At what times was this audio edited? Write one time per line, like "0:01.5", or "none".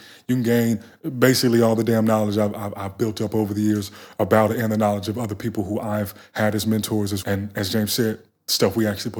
0:07.2